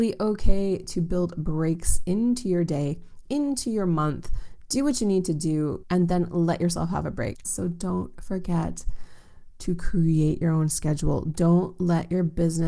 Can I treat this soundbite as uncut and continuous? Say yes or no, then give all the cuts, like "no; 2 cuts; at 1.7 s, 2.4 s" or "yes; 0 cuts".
no; 3 cuts; at 3.2 s, 5.8 s, 7.4 s